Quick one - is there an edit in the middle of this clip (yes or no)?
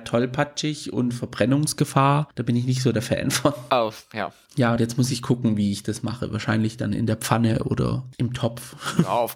no